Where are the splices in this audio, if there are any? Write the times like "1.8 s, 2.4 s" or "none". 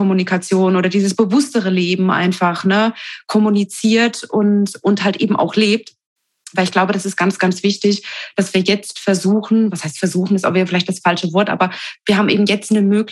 none